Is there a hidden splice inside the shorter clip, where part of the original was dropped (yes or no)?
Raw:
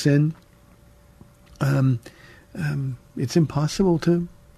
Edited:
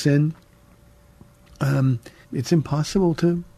yes